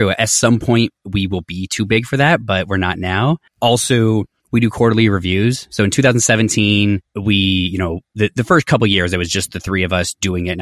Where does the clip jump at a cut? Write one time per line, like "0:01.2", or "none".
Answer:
none